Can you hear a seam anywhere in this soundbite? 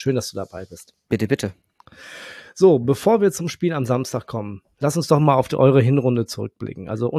no; 0 cuts

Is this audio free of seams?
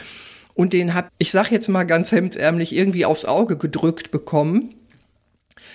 no; 1 cut; at 1.1 s

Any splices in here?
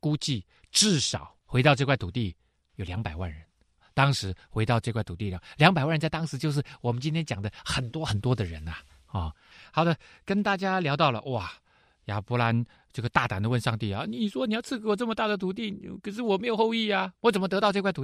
yes; 1 cut; at 1.4 s

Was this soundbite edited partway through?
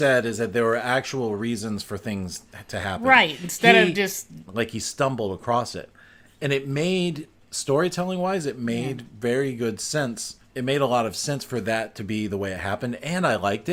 yes; 2 cuts; at 4.5 s, 10.4 s

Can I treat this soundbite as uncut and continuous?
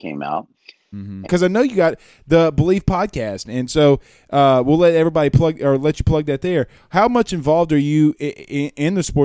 no; 1 cut; at 1.2 s

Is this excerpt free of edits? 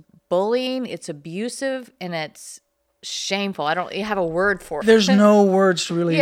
no; 1 cut; at 4.8 s

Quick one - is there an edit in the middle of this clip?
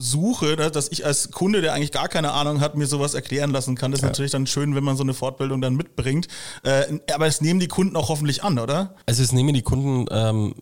no; 0 cuts

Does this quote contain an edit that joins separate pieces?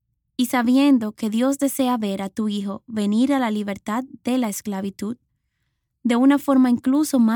no; 0 cuts

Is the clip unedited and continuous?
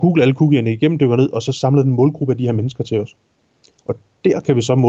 yes; 0 cuts

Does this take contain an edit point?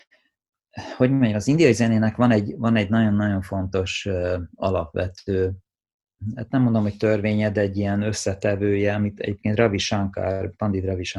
no; 0 cuts

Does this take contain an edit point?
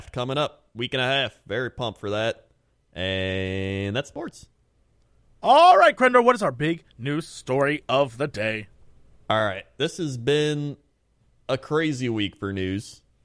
no; 0 cuts

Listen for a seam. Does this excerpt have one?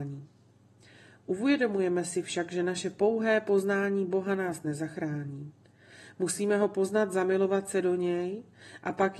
no; 0 cuts

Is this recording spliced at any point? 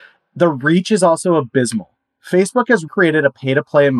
yes; 1 cut; at 2.9 s

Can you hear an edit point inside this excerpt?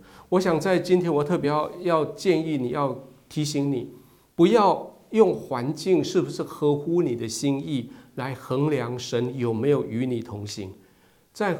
no; 0 cuts

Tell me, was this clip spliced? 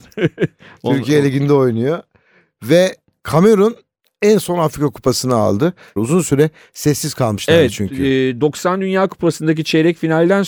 yes; 1 cut; at 6.0 s

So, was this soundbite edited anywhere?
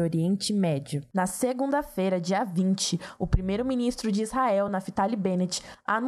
no; 0 cuts

